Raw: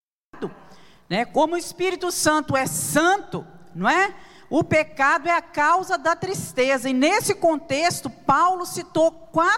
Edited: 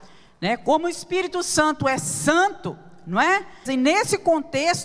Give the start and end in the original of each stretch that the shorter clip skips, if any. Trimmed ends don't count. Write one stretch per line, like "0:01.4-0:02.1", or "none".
0:04.3-0:06.8